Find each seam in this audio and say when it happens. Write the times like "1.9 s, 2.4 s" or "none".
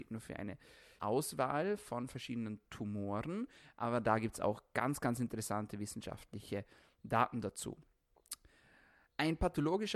1.0 s